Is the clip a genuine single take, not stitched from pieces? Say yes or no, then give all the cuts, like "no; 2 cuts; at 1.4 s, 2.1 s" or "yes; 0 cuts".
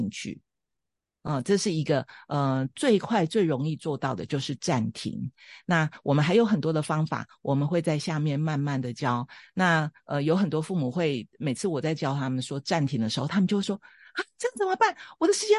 yes; 0 cuts